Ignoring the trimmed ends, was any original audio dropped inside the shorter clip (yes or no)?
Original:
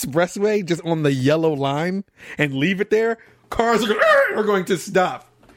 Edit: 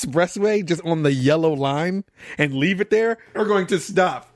yes